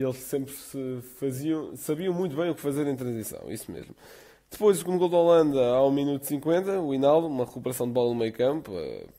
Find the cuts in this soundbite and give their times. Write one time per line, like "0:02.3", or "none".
none